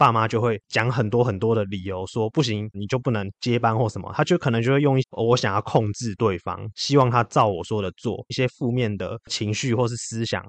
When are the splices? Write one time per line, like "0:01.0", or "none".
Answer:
0:02.7
0:05.0
0:08.3

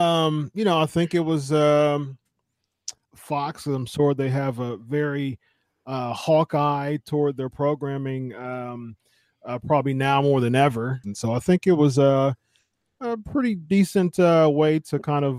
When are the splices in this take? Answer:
0:03.1
0:11.0

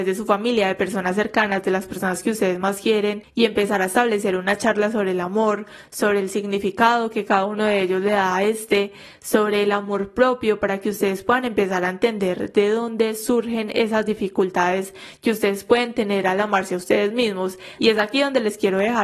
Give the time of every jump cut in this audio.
0:17.8

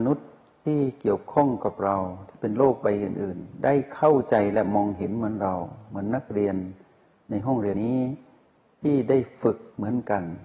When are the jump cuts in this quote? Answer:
0:07.7

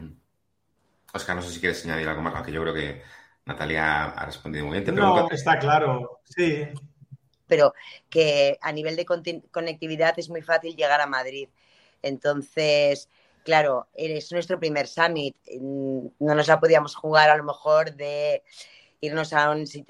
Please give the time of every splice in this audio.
0:05.3
0:07.5

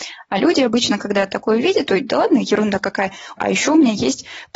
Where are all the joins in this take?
0:01.9
0:03.4

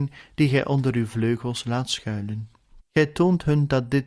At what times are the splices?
0:02.8

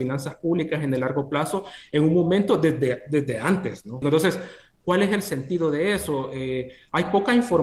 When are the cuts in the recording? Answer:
0:04.0

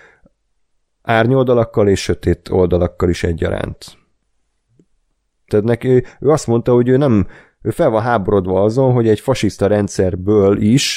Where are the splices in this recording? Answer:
0:05.5

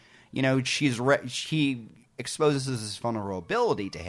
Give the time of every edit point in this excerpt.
none

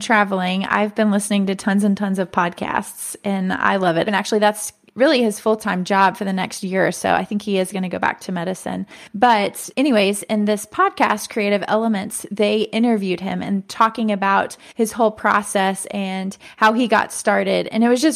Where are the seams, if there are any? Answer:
0:04.1

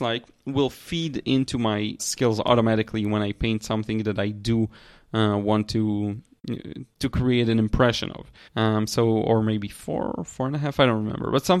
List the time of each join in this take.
0:02.0
0:08.5

